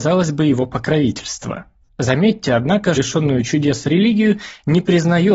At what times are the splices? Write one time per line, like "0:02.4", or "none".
0:01.9
0:03.0